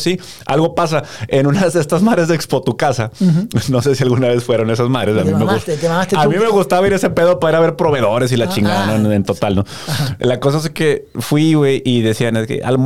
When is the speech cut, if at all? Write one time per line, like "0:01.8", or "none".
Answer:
none